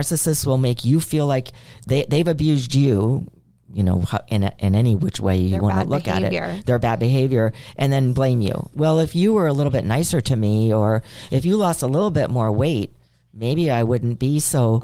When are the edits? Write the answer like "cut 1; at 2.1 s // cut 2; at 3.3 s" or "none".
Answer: none